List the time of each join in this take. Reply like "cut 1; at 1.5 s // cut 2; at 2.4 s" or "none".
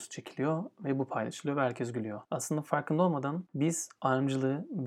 none